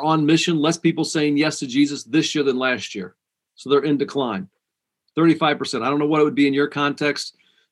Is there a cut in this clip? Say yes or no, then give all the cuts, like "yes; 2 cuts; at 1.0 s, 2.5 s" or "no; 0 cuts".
yes; 1 cut; at 5.1 s